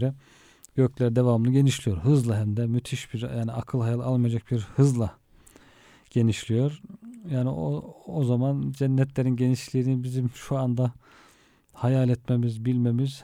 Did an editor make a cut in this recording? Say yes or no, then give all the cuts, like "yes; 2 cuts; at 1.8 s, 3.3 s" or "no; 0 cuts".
no; 0 cuts